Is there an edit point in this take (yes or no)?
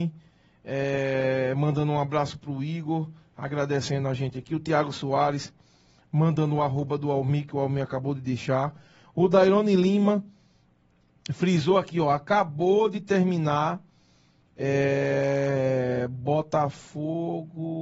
no